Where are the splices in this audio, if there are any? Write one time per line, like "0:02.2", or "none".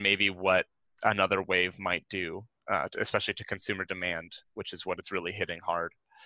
none